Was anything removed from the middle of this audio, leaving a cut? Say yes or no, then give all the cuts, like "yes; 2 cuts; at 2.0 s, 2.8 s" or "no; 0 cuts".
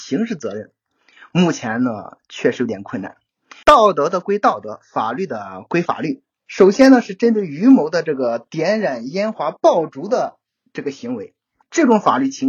yes; 1 cut; at 3.6 s